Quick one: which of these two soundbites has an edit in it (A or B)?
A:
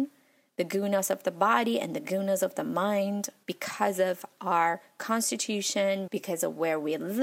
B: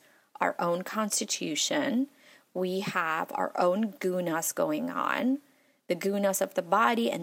A